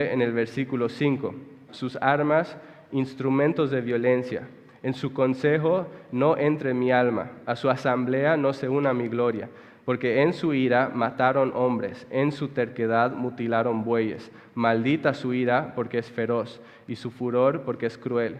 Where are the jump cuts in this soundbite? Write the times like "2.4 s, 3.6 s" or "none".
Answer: 1.7 s